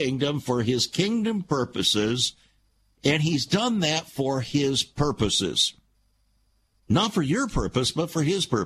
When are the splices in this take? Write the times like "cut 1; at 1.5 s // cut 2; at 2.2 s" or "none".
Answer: cut 1; at 2.9 s